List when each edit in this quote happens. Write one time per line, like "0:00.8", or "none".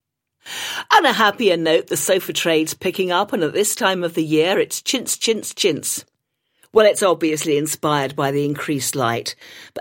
none